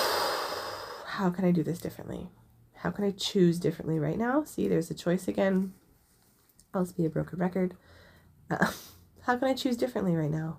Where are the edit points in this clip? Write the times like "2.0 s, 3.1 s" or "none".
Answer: none